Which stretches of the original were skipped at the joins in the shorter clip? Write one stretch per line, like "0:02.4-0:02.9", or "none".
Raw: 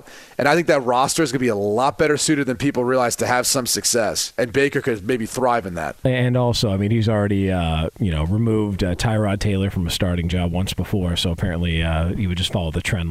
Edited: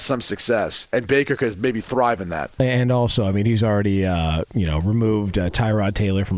none